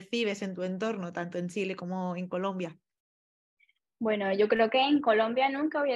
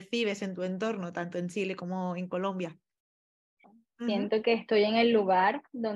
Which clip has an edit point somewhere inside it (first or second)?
second